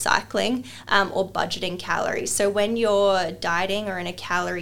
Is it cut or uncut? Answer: uncut